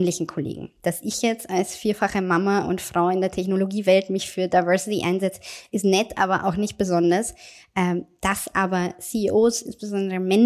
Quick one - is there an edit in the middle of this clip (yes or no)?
no